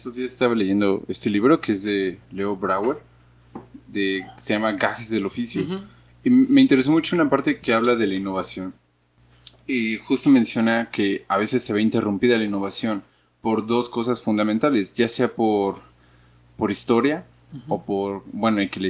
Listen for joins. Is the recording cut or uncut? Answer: uncut